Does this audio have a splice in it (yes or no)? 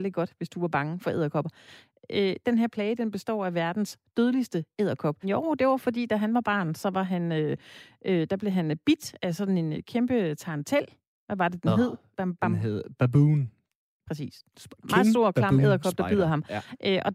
yes